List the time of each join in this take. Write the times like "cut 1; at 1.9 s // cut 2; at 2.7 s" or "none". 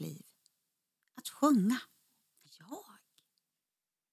cut 1; at 2.4 s